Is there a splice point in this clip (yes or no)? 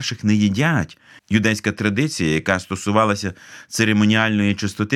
yes